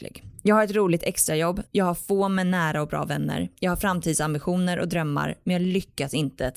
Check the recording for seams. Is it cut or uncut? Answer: uncut